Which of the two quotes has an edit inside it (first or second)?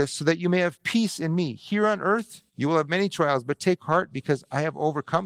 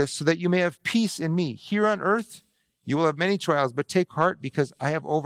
first